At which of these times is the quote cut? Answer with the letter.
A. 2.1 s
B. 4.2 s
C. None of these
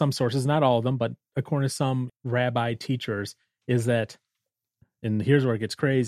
A